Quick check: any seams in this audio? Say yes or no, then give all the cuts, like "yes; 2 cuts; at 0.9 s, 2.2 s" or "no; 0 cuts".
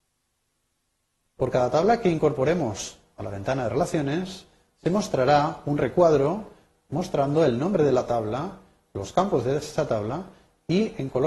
no; 0 cuts